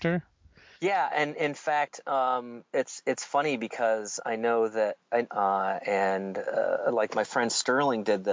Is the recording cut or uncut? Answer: cut